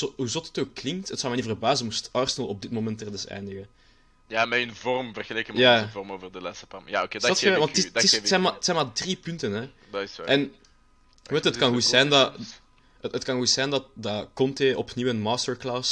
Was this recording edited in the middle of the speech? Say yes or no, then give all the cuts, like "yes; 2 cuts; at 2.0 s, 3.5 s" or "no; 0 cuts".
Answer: yes; 1 cut; at 9.6 s